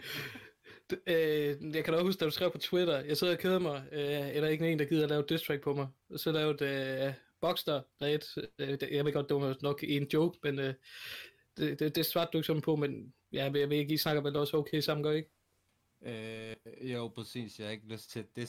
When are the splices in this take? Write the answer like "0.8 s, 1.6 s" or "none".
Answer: none